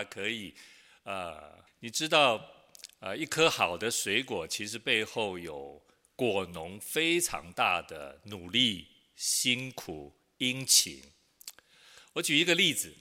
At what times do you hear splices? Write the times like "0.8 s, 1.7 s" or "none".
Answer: 1.7 s